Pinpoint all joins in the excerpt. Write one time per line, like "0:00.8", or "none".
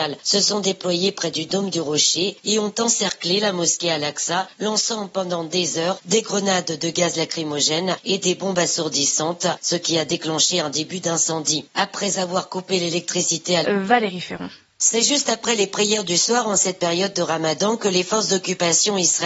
0:13.6